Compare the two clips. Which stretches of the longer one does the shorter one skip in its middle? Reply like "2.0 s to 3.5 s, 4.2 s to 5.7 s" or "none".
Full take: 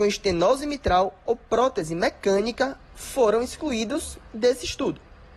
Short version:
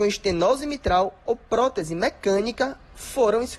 none